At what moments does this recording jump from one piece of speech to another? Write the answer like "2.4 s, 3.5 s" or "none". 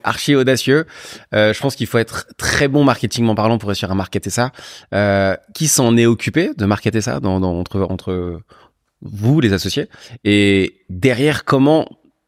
none